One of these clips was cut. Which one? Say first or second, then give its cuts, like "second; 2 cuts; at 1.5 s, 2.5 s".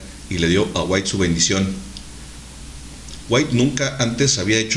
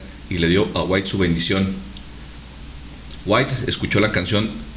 first; 1 cut; at 3.2 s